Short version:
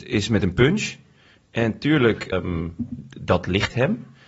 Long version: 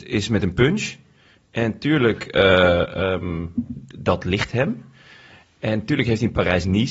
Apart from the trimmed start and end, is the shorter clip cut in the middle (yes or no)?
yes